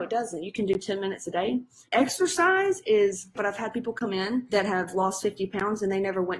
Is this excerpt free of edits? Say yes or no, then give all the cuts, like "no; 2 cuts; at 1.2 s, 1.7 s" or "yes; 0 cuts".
no; 2 cuts; at 1.9 s, 3.4 s